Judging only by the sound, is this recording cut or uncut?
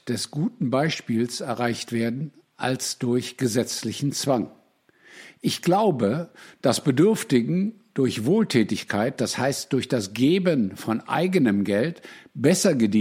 uncut